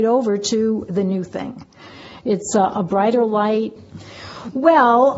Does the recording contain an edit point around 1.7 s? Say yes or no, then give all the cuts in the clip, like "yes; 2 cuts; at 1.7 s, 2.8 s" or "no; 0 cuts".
no; 1 cut; at 3.8 s